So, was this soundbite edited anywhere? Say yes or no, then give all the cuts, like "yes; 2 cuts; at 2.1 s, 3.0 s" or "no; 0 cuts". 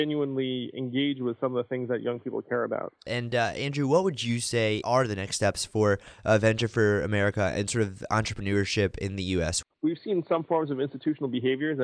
yes; 2 cuts; at 3.0 s, 9.7 s